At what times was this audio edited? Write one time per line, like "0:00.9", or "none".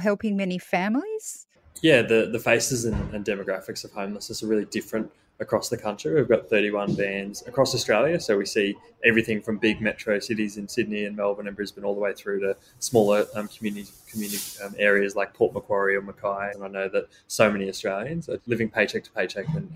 0:16.5
0:18.4